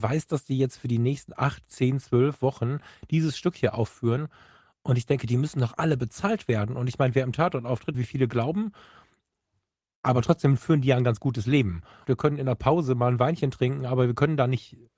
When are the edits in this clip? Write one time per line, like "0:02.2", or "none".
0:07.9
0:12.0

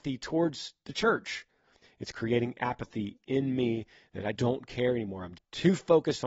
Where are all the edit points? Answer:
0:01.8
0:04.3
0:05.3

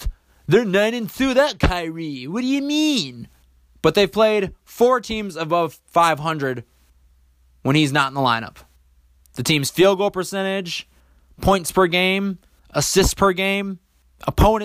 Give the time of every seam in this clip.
0:03.7
0:09.2

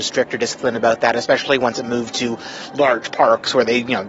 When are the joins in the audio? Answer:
none

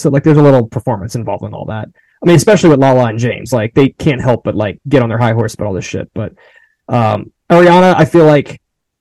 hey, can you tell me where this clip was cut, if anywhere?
none

